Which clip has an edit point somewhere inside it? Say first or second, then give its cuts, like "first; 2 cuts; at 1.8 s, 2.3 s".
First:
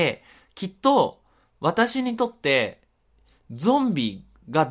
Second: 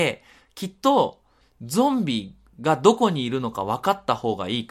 second; 1 cut; at 1.4 s